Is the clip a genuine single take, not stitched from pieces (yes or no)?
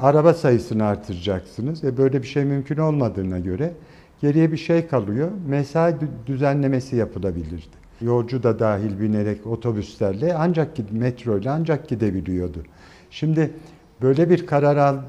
no